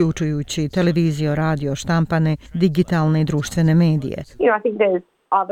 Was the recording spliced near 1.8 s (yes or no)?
no